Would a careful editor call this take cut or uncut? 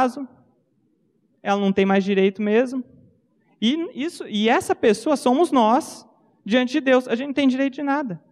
uncut